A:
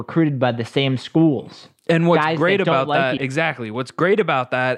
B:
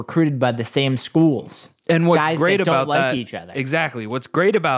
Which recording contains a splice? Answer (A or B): A